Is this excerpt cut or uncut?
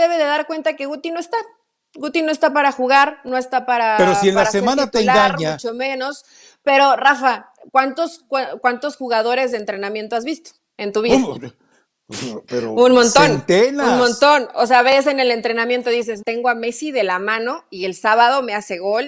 cut